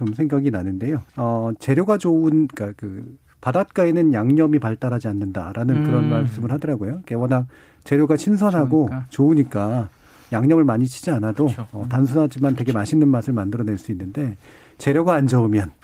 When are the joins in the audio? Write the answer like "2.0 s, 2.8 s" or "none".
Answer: 1.1 s